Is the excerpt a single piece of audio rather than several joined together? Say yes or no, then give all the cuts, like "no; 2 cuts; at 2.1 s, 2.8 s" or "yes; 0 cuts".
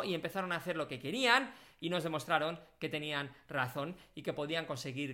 yes; 0 cuts